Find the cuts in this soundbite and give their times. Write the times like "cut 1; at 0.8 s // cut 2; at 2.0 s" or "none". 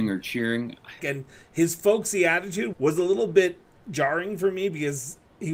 cut 1; at 1.0 s // cut 2; at 2.7 s